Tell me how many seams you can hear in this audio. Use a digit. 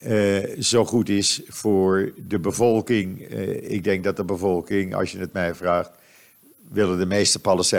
0